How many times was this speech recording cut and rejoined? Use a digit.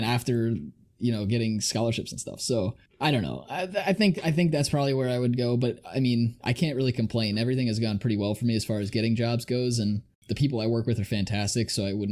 0